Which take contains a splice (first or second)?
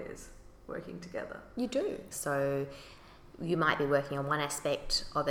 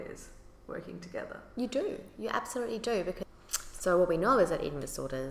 first